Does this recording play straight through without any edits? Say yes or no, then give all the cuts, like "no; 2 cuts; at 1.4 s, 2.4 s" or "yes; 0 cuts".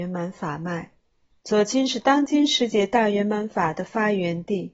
no; 1 cut; at 1.3 s